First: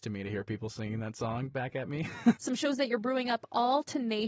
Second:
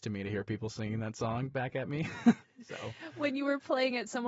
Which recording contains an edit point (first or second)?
first